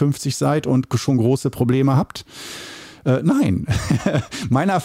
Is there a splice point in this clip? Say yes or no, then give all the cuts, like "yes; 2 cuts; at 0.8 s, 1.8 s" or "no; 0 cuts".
yes; 1 cut; at 3.0 s